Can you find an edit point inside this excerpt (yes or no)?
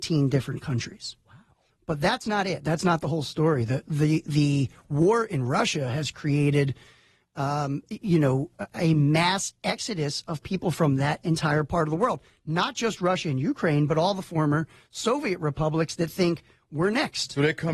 yes